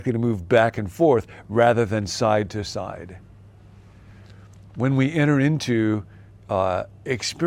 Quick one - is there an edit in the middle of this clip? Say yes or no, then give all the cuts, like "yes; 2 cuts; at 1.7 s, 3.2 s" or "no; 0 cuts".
no; 0 cuts